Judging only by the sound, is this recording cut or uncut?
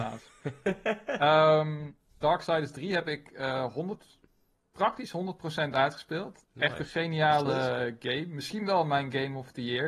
cut